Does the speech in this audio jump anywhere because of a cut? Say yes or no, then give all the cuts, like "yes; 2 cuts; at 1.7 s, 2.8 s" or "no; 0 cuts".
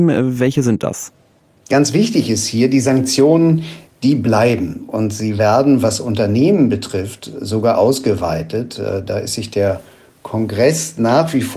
no; 0 cuts